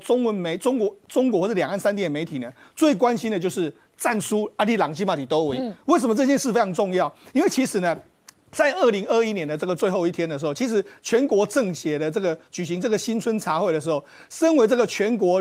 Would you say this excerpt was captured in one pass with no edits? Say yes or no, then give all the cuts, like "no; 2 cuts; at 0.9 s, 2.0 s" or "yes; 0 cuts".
yes; 0 cuts